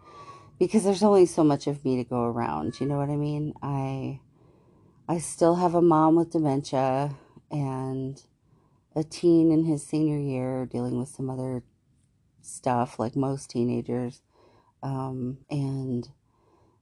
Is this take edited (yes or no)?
yes